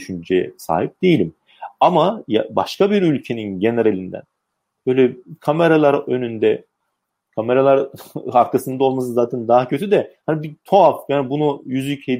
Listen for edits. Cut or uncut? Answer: uncut